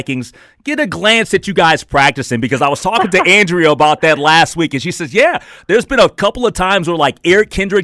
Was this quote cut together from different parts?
no; 0 cuts

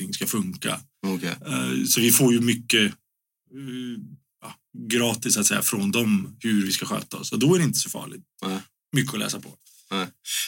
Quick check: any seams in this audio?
no; 0 cuts

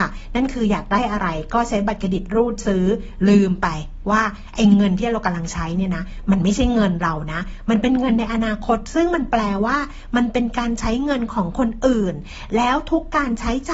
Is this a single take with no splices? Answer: yes; 0 cuts

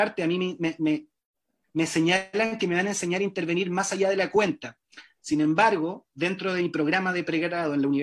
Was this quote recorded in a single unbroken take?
no; 1 cut; at 6.1 s

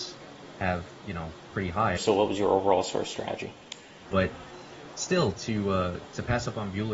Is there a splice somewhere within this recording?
yes; 2 cuts; at 2.0 s, 4.0 s

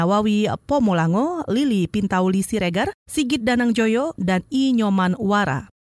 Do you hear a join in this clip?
yes; 1 cut; at 4.2 s

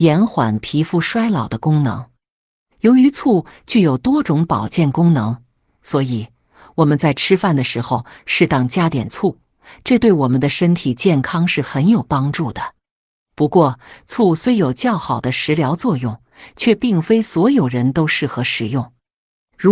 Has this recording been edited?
no; 0 cuts

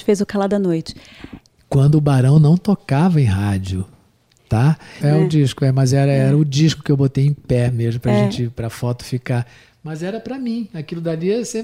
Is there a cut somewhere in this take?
yes; 2 cuts; at 1.5 s, 5.0 s

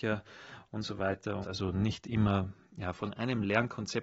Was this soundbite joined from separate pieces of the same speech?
yes; 2 cuts; at 1.4 s, 2.9 s

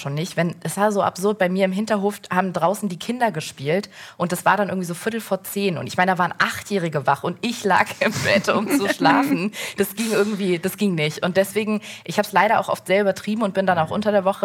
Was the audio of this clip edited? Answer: no; 0 cuts

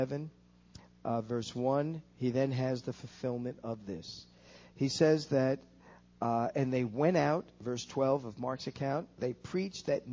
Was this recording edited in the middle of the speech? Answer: no; 0 cuts

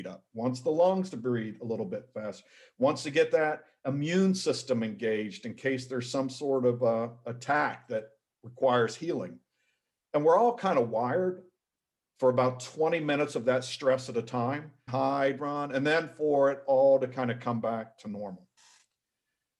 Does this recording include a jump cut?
yes; 1 cut; at 14.9 s

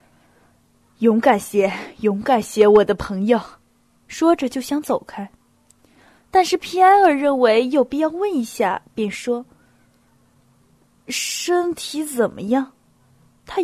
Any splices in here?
yes; 1 cut; at 4.0 s

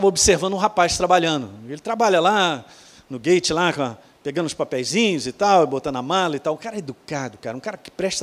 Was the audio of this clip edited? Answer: no; 0 cuts

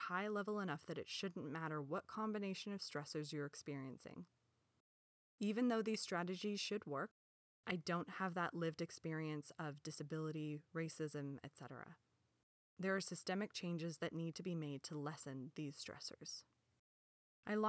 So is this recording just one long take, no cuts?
yes; 0 cuts

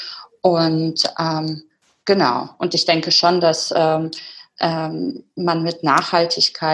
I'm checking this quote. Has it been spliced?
no; 0 cuts

